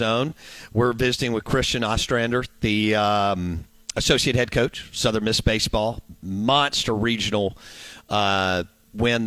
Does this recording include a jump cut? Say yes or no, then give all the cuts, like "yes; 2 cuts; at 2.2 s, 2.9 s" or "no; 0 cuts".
no; 0 cuts